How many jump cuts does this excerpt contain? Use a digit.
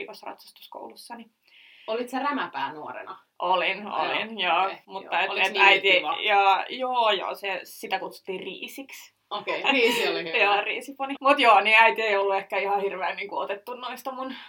2